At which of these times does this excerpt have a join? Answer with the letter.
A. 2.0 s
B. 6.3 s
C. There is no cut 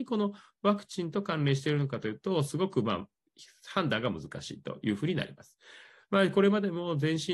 C